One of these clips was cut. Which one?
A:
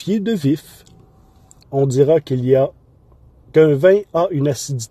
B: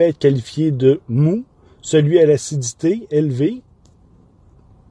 A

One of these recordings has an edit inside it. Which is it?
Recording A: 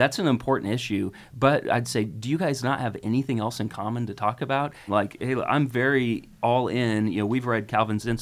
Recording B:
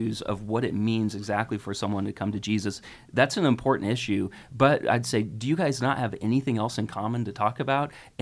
A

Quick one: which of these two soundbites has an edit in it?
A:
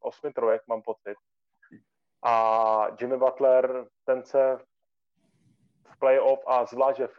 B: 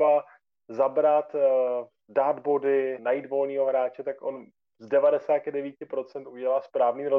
B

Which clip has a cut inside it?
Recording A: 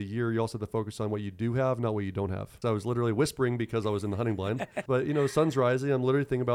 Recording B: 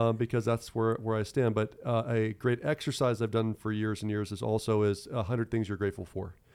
A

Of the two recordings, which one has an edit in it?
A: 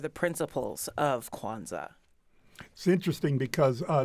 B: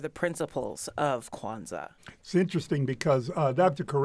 B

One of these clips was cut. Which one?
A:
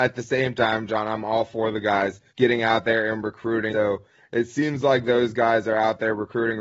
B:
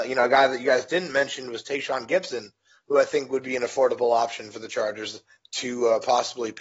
A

